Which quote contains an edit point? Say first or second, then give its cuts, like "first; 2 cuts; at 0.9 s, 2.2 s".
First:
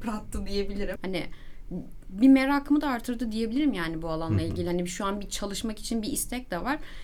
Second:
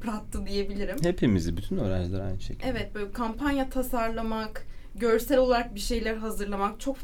first; 1 cut; at 1.0 s